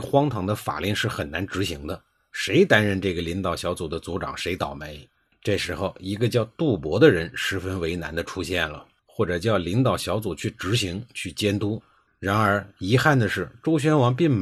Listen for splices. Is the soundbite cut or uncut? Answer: cut